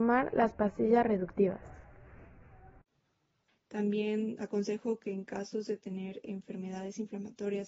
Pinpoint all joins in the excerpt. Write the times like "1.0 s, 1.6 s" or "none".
3.5 s